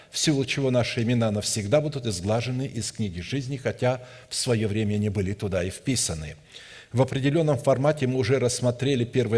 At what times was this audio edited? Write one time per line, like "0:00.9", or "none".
none